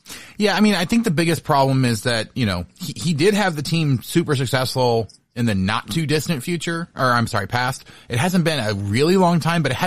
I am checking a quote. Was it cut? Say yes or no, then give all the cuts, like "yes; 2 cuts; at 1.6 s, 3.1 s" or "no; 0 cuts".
no; 0 cuts